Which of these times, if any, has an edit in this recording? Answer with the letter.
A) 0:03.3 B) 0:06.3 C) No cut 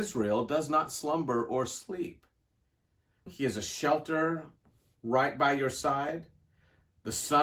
A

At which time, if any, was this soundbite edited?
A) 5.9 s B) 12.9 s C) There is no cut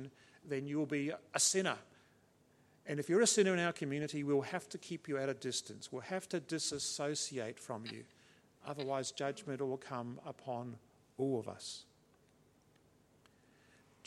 C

